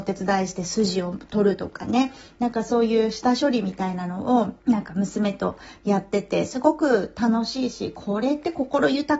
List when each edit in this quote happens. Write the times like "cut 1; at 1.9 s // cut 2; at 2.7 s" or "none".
cut 1; at 4.6 s